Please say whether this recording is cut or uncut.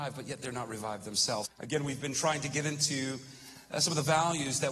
cut